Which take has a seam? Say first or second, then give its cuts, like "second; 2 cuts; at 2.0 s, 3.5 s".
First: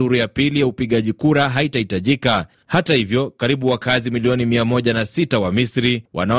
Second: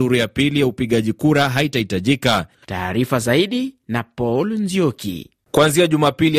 second; 1 cut; at 2.6 s